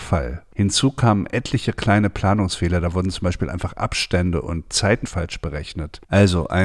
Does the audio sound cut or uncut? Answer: cut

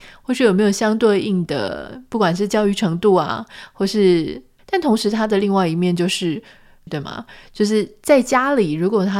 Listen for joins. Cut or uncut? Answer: cut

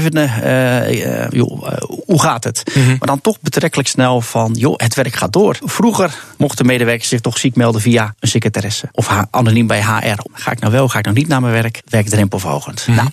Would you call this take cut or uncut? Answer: cut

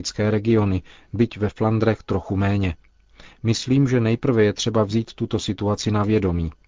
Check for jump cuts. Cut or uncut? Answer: uncut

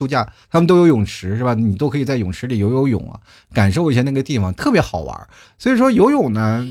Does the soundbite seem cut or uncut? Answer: uncut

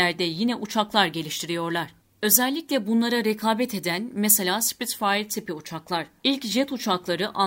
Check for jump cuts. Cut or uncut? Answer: cut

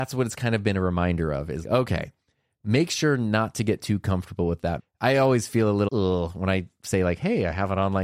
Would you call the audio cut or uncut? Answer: cut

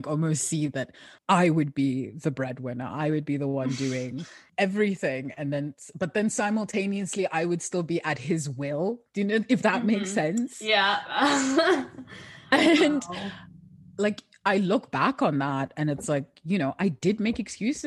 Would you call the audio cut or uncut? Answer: cut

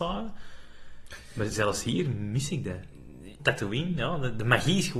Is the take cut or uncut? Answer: cut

